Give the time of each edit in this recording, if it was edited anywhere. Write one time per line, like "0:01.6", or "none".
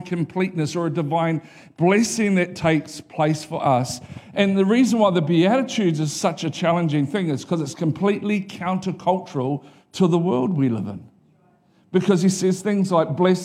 none